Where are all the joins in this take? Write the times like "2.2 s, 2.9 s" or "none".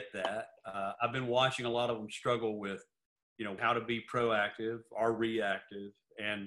3.6 s

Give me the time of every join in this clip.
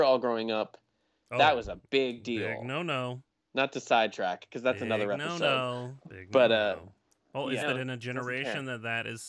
7.6 s

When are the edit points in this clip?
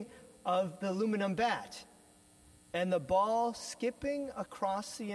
none

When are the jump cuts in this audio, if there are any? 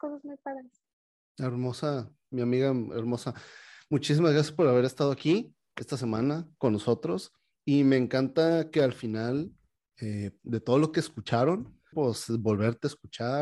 10.4 s, 11.9 s

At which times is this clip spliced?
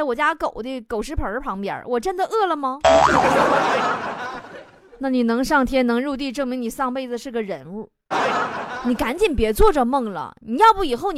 8.1 s

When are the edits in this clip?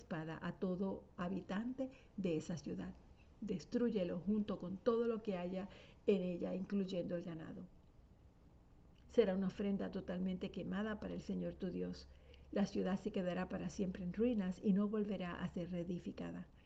9.0 s

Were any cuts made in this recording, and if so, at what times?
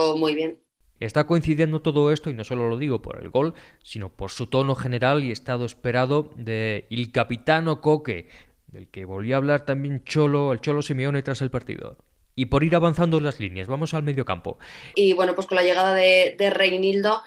1.0 s, 12.2 s, 14.9 s

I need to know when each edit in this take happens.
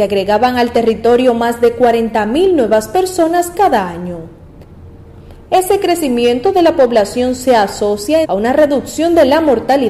5.5 s, 8.2 s

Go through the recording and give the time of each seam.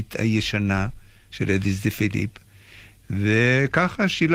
1.3 s

